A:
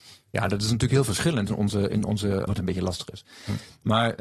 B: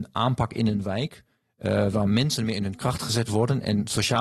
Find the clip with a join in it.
A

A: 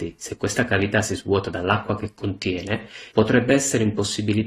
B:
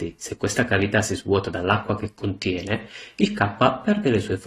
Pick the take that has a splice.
A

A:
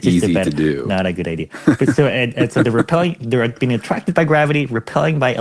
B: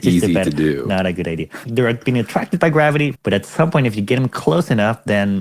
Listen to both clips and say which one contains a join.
B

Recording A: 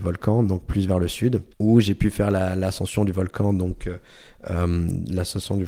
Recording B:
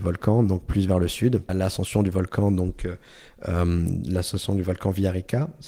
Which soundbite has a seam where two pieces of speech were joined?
B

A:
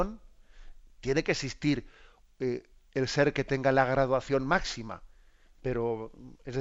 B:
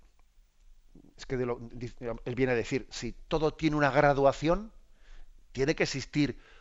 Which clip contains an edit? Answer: A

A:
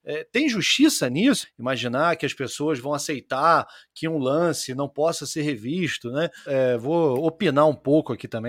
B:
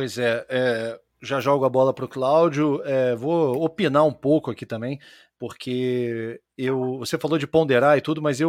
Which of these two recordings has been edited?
A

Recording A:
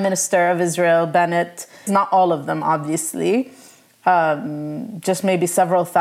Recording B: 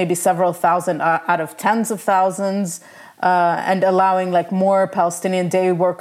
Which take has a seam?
A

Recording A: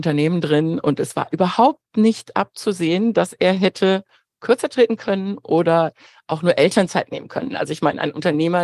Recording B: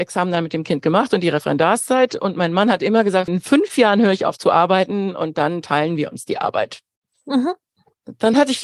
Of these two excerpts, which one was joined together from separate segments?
B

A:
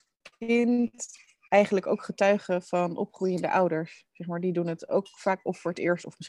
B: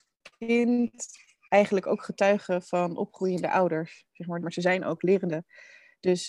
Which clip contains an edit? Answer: B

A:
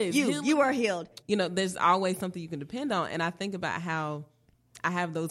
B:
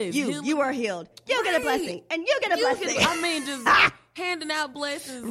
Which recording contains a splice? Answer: A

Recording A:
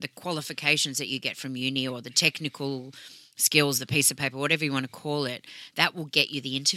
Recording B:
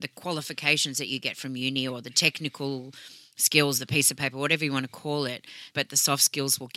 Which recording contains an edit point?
B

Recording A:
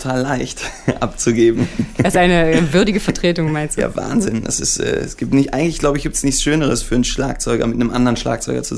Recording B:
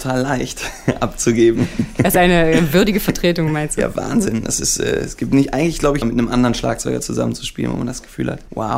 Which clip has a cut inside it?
B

